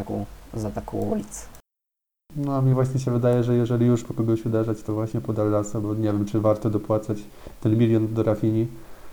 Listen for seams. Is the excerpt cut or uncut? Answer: uncut